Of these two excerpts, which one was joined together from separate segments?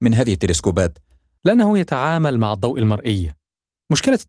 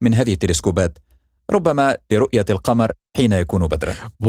first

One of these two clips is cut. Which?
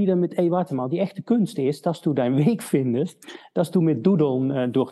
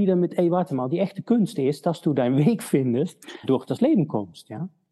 second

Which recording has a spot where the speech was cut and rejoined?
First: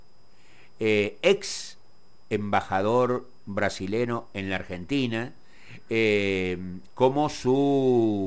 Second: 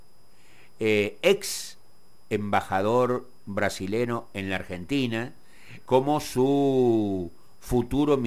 second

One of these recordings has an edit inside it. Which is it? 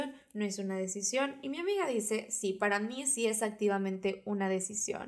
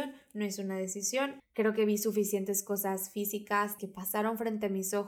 second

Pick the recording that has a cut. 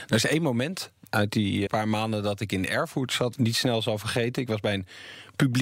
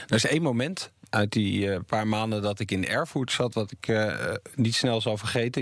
first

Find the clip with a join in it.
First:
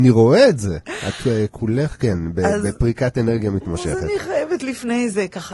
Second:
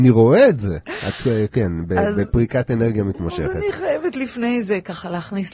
second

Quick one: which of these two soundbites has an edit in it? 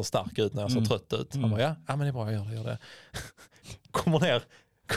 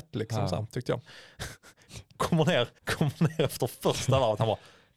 second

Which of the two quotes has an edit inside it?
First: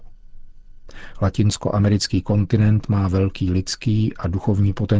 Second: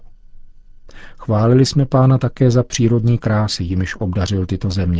first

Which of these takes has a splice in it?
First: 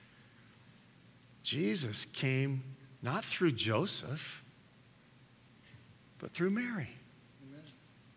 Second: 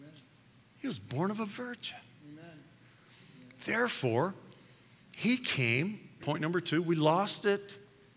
second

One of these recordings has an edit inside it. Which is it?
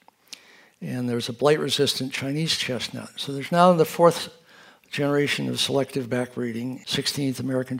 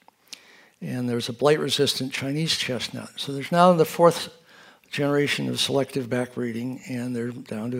first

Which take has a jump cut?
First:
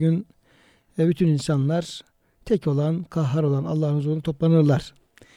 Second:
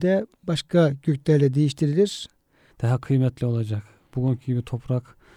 second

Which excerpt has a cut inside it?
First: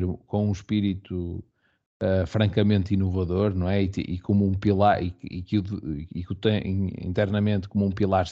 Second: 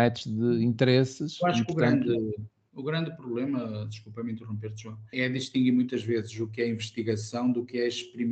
second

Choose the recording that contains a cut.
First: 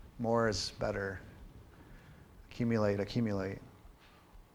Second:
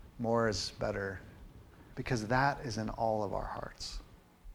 second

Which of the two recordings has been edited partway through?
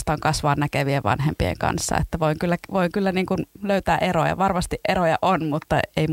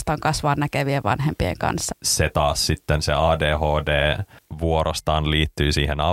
second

